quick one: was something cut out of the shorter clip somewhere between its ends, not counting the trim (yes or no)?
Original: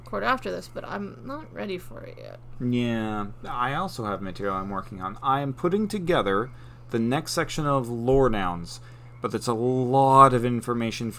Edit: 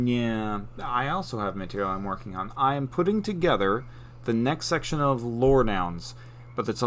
no